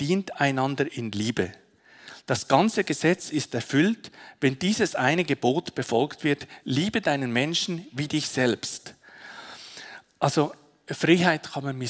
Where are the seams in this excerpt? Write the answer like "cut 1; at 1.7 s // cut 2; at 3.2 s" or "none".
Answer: none